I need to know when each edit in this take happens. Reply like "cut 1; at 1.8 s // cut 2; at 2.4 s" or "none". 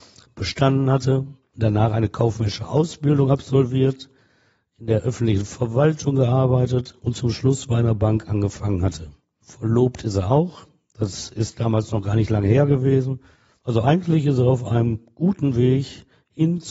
none